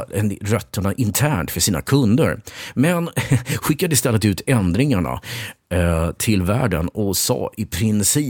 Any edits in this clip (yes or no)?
no